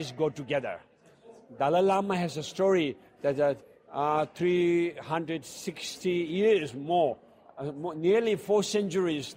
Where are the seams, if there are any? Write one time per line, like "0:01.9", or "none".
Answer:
none